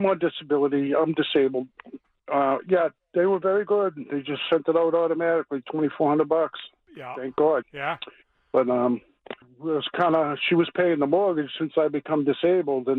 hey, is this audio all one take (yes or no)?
no